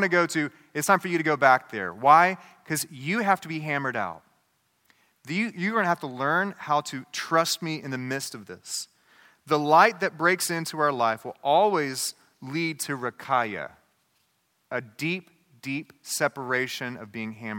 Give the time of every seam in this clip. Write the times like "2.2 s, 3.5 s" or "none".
none